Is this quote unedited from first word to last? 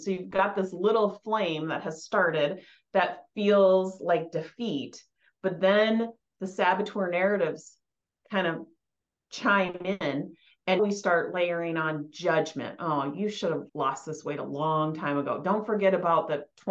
no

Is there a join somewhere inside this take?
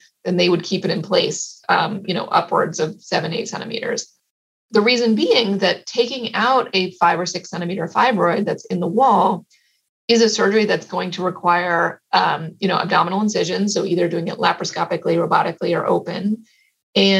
no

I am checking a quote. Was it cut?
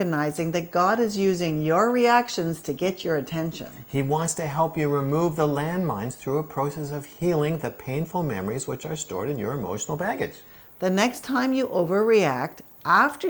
no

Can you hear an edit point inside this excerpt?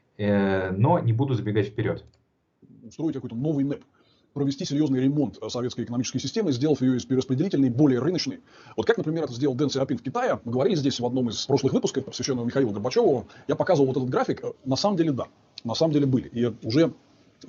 yes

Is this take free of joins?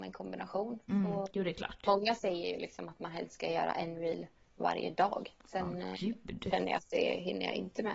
yes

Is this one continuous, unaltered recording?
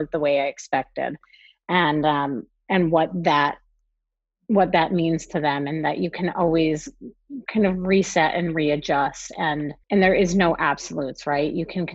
no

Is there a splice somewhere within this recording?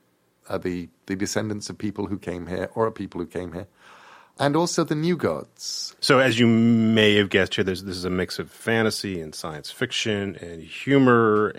yes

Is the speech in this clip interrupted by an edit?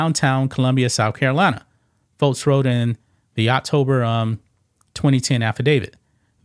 no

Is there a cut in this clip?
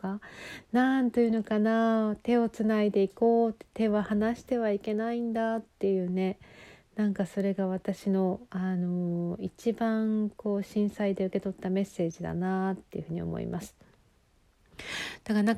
no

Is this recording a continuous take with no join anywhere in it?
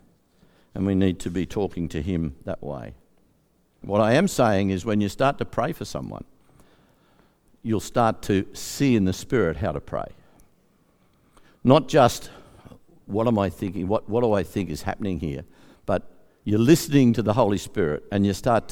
no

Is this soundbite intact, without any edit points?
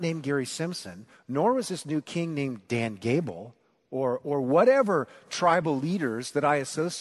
yes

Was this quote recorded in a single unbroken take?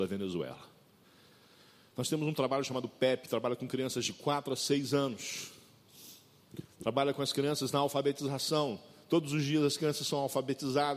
yes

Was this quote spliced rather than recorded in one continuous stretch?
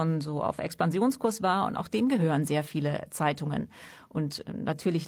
no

